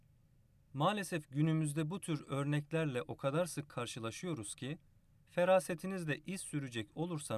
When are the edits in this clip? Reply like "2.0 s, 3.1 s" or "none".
5.1 s